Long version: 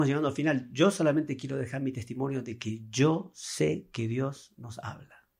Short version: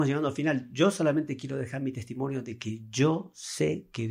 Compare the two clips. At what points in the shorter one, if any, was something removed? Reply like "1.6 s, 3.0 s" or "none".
none